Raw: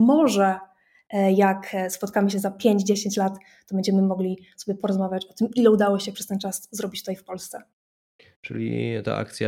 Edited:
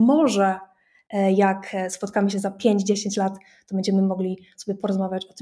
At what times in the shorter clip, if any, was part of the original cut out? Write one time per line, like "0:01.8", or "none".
none

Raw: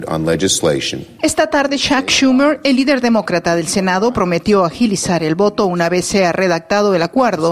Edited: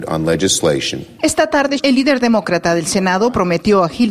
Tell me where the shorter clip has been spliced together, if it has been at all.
0:01.8

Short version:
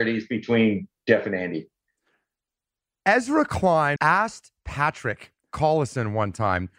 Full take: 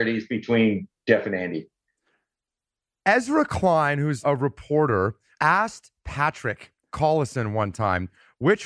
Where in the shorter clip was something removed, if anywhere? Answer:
0:04.0

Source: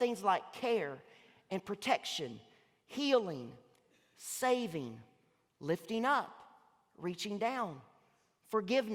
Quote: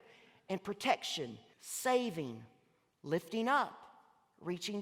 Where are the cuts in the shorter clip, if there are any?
0:01.5

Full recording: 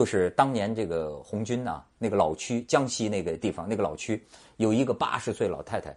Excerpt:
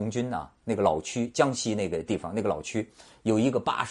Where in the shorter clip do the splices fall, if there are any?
none

